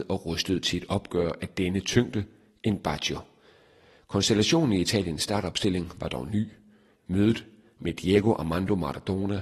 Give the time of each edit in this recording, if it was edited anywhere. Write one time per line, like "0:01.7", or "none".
0:07.0